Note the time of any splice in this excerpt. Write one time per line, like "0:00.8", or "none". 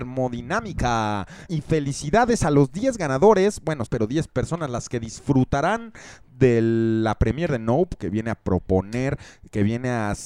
0:01.5
0:03.9
0:08.0